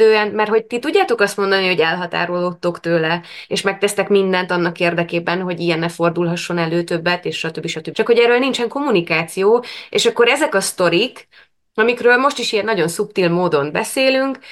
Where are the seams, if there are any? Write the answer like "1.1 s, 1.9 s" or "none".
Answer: 7.9 s